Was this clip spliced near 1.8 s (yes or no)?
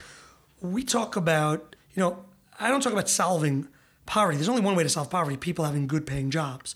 yes